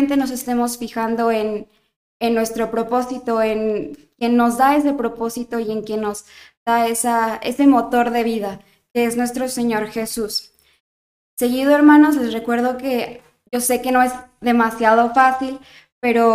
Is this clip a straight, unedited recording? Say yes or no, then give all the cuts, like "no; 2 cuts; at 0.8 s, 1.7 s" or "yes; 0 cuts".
yes; 0 cuts